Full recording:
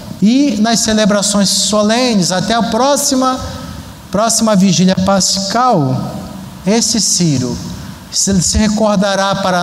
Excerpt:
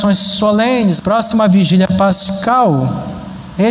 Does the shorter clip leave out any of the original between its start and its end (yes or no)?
yes